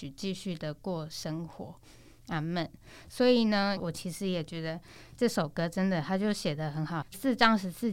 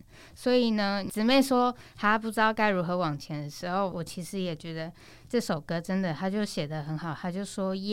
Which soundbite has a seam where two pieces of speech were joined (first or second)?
first